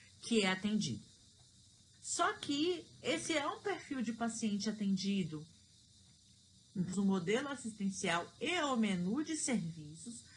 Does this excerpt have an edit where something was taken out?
yes; 2 cuts; at 1.9 s, 6.9 s

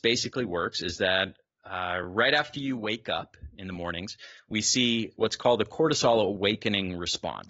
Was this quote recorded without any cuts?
yes; 0 cuts

